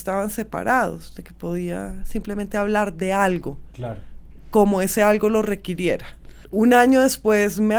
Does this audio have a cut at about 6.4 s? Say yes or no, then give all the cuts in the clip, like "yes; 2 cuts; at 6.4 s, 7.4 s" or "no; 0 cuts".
yes; 1 cut; at 6.4 s